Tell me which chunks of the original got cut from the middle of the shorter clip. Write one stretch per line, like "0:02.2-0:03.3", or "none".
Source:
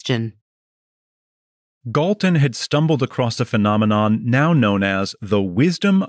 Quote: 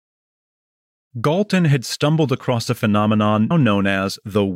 0:04.2-0:04.5